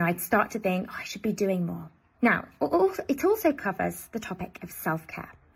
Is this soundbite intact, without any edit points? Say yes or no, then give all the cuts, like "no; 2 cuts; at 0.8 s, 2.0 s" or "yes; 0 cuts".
no; 1 cut; at 2.1 s